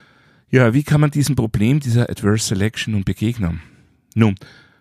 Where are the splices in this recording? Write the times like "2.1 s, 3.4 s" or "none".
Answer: none